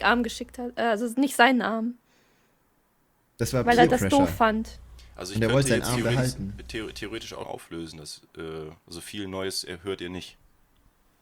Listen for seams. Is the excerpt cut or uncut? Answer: cut